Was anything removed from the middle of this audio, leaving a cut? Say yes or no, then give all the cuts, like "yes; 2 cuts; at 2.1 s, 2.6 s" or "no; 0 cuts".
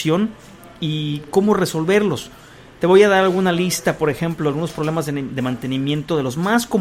no; 0 cuts